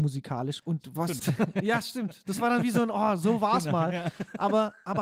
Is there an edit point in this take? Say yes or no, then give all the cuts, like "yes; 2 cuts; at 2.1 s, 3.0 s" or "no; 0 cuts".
yes; 1 cut; at 1.2 s